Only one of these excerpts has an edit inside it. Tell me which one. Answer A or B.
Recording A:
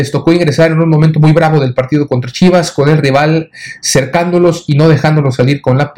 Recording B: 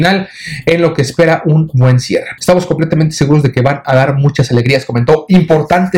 B